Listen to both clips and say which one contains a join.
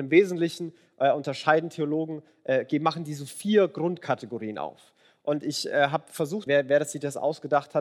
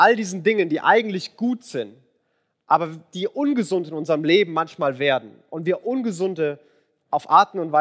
first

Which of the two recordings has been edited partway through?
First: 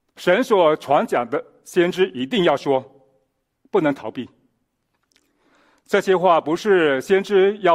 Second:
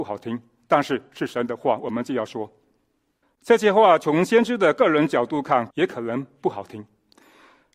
second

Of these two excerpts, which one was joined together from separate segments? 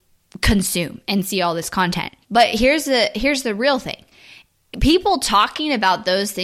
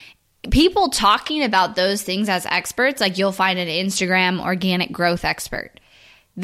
first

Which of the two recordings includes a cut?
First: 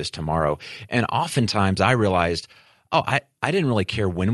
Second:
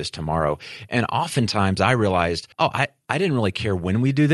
second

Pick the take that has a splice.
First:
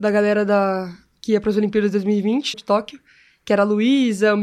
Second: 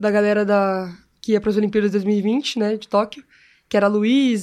first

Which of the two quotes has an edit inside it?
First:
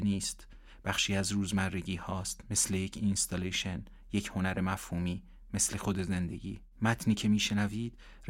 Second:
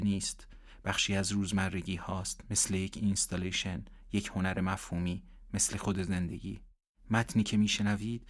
first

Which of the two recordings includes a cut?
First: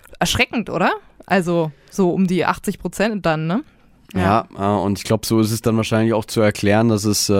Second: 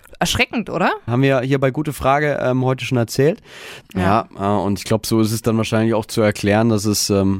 second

